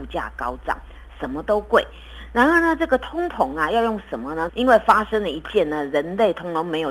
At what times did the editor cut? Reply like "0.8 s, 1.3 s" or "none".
4.5 s